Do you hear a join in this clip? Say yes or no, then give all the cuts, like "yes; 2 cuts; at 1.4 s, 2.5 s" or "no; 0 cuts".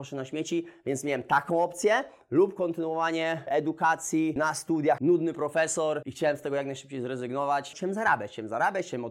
yes; 2 cuts; at 5.0 s, 7.7 s